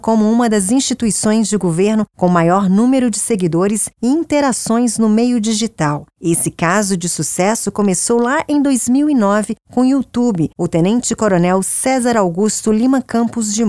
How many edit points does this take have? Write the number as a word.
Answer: one